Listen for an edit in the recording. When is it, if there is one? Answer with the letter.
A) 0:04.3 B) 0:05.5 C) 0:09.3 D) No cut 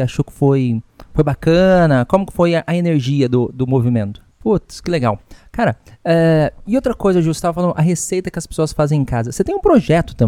A